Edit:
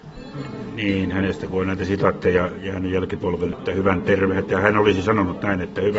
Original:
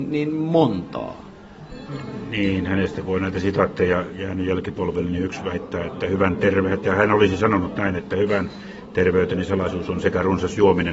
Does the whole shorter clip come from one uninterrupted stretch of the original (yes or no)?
no